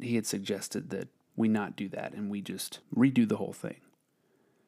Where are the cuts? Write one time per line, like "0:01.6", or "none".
0:01.1
0:02.8